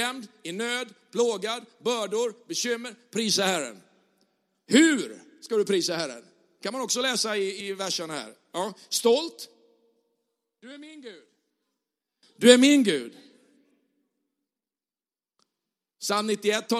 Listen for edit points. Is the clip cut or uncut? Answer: cut